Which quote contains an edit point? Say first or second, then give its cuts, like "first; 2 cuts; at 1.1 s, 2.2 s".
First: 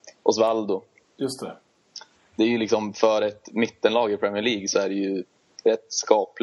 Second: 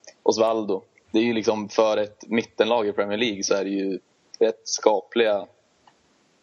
second; 1 cut; at 1.1 s